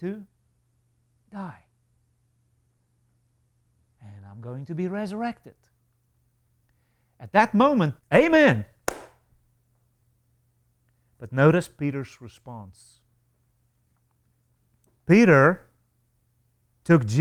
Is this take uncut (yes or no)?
no